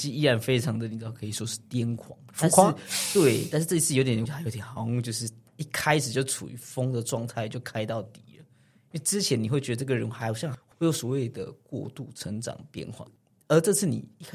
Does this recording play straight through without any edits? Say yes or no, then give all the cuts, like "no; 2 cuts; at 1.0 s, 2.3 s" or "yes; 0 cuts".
no; 1 cut; at 4.3 s